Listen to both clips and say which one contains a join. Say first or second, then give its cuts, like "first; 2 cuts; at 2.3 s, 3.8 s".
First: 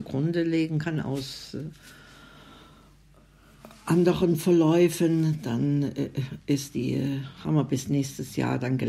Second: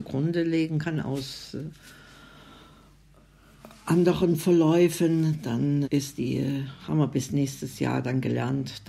second; 1 cut; at 5.8 s